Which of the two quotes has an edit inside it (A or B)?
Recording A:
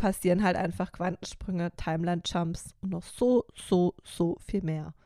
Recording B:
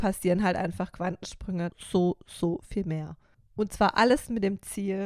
B